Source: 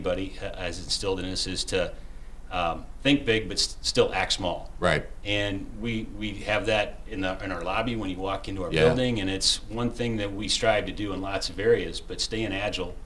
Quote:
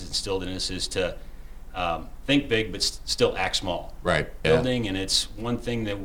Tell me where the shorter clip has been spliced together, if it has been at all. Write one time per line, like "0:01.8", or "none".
0:04.4